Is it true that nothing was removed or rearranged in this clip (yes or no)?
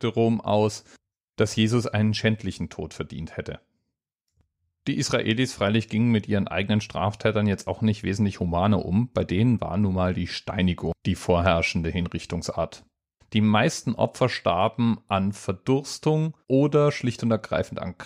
no